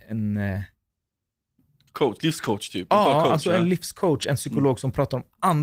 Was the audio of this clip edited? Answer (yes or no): no